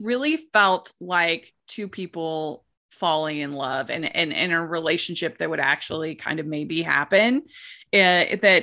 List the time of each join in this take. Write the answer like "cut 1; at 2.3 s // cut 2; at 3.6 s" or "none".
none

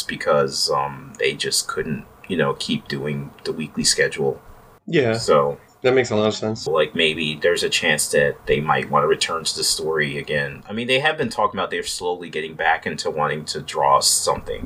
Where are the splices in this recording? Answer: cut 1; at 6.7 s

